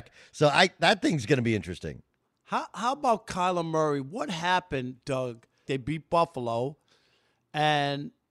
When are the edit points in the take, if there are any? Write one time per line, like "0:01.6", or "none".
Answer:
0:05.7